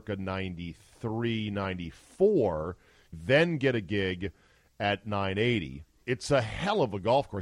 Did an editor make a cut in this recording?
yes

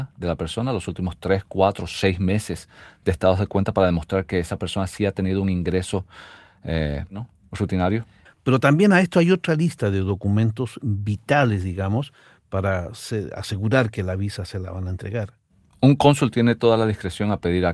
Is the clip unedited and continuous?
no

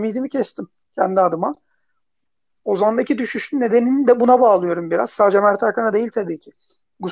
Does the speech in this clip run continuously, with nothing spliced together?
yes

